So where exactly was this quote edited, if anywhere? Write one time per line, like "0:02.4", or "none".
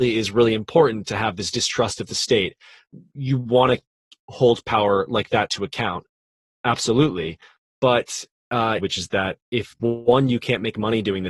0:08.8